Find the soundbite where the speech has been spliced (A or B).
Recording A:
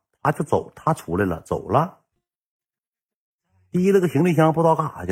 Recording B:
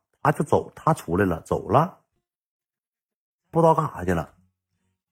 B